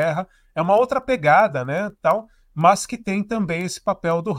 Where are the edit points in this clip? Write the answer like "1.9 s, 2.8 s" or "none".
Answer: none